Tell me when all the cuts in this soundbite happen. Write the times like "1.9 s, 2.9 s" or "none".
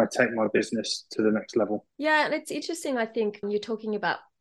1.9 s, 3.4 s

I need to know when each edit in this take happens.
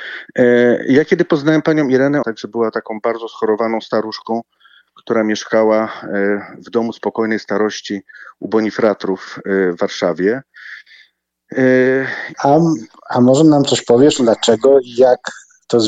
2.2 s, 12.3 s

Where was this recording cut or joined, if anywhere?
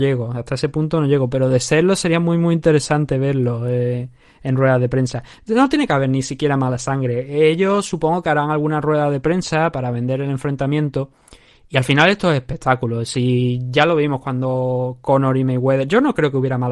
none

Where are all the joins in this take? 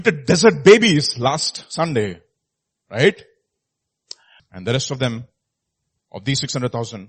4.4 s

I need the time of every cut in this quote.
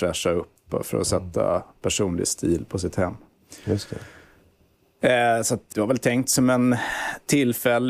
5.7 s

